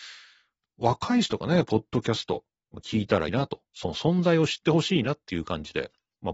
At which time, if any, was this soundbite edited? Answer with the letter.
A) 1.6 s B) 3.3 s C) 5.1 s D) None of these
B